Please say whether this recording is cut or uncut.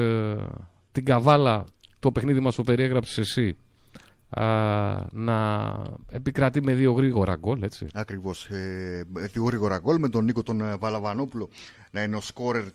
uncut